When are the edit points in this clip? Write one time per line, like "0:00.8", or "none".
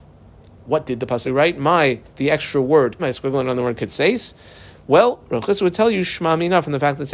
0:01.2
0:03.0